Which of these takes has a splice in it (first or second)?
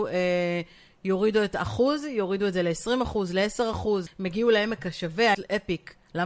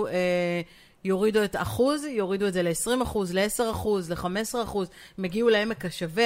first